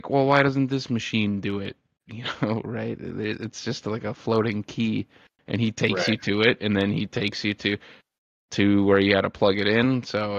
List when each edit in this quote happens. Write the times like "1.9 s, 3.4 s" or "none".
none